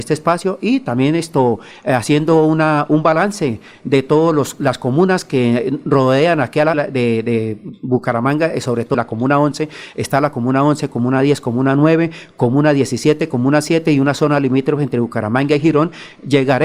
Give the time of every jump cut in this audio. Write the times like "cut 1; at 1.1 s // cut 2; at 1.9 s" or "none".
cut 1; at 6.7 s // cut 2; at 8.9 s